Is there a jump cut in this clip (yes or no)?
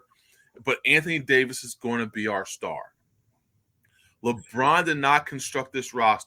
no